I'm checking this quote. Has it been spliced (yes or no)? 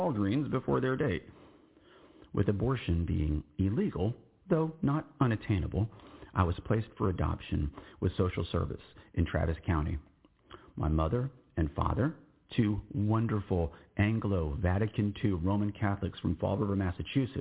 no